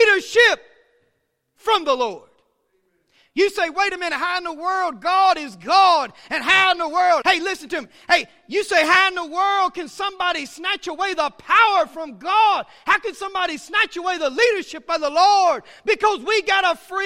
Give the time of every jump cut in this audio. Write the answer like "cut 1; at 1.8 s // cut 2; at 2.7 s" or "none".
cut 1; at 7.2 s

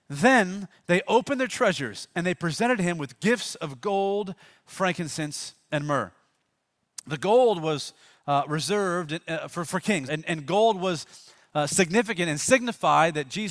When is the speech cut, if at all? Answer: cut 1; at 10.1 s

